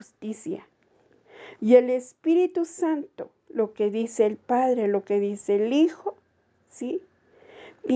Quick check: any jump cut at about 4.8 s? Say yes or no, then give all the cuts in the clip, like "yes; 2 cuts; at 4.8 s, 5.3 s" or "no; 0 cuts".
no; 1 cut; at 1.6 s